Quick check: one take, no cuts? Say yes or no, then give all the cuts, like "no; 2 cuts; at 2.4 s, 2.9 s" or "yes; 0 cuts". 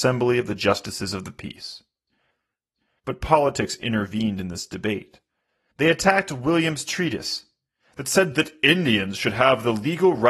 no; 1 cut; at 5.7 s